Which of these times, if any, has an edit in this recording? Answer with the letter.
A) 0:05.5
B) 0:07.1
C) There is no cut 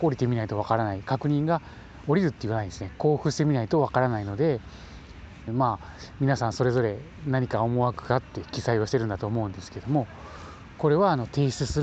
A